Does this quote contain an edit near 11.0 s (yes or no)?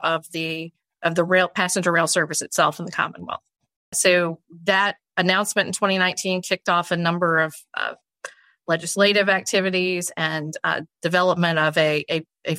no